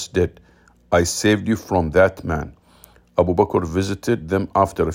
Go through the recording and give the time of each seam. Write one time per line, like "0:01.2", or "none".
none